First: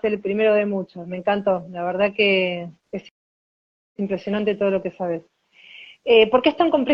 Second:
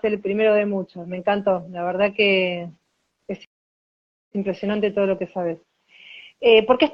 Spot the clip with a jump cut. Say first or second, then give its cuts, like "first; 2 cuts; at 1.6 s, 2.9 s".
first; 1 cut; at 2.8 s